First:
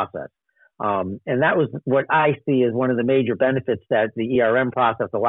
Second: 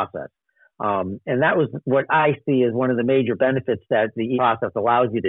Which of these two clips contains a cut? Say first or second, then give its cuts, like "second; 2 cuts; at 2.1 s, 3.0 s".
second; 1 cut; at 4.4 s